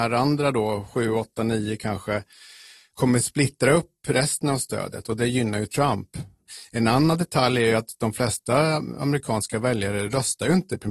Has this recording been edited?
no; 0 cuts

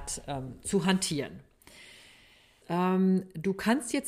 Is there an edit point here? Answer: yes; 1 cut; at 2.6 s

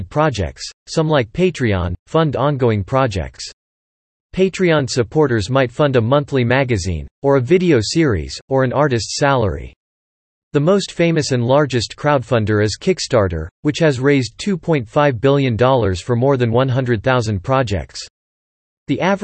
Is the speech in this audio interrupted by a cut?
no; 0 cuts

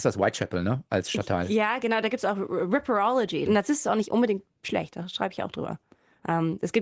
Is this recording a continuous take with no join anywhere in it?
no; 1 cut; at 3.5 s

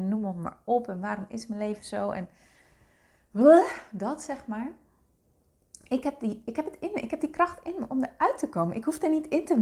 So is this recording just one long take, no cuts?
yes; 0 cuts

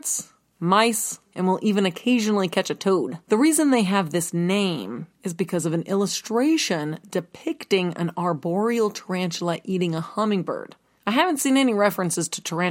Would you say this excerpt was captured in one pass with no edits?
no; 3 cuts; at 1.2 s, 3.2 s, 11.0 s

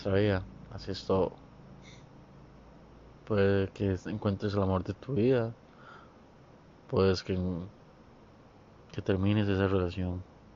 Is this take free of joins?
yes; 0 cuts

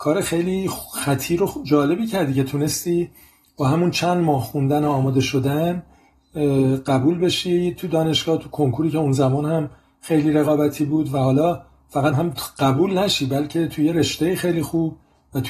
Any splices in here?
yes; 1 cut; at 12.1 s

